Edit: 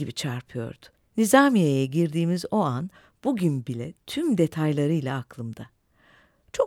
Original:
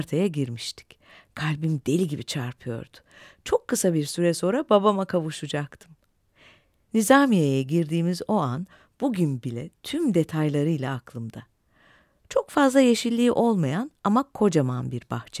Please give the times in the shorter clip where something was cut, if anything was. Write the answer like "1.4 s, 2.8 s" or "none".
0.9 s